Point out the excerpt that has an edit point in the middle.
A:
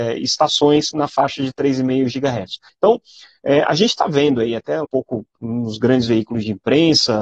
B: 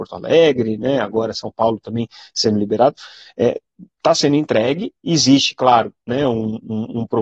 A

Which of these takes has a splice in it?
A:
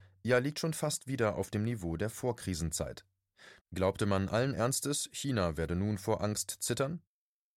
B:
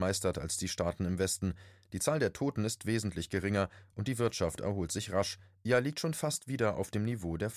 A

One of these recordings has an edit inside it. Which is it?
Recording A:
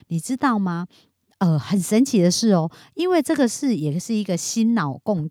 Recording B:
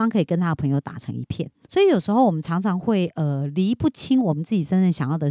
B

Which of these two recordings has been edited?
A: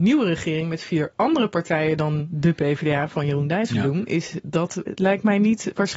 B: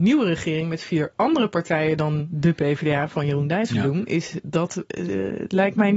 A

